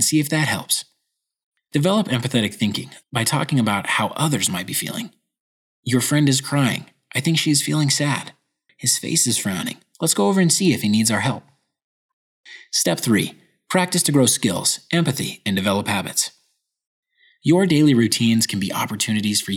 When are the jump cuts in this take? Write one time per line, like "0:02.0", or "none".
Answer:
0:08.7

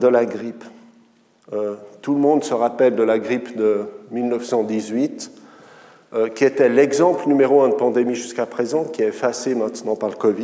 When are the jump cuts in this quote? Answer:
none

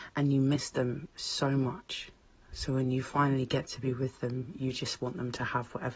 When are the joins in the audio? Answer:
none

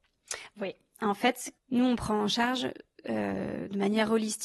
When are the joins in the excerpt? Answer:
0:01.6

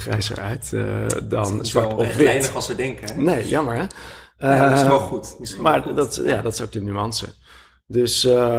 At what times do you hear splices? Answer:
none

